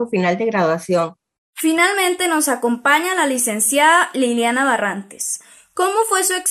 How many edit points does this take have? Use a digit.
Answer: 1